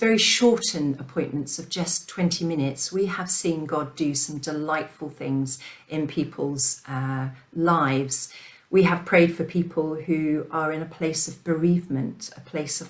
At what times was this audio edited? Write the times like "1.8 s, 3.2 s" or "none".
none